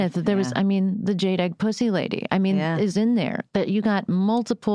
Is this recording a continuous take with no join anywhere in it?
yes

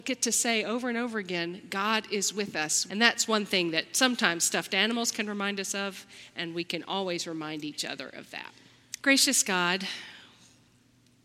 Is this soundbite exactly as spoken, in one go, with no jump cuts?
no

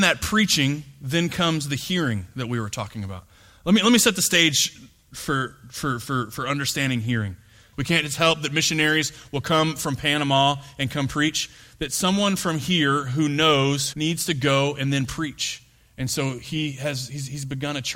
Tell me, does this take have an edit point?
yes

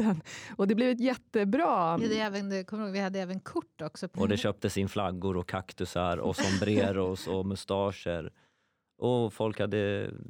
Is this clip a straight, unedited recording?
no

